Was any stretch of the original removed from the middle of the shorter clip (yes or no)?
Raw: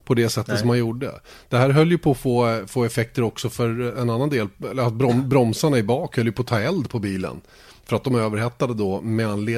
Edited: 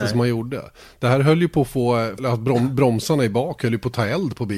yes